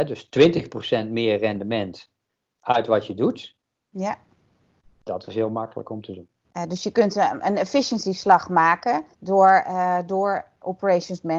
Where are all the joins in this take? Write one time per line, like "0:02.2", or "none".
0:06.4
0:09.1